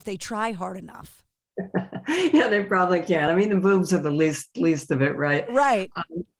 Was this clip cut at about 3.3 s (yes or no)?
no